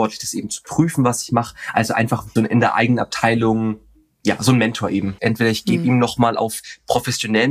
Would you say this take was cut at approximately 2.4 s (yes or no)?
yes